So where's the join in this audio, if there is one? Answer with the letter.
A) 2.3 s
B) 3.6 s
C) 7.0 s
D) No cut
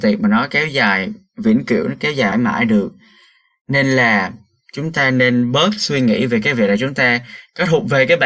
A